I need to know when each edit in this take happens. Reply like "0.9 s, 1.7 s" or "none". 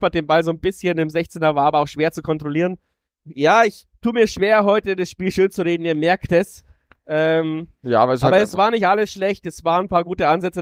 none